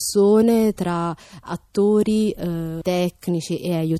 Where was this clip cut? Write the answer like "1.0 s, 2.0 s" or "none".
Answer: 2.8 s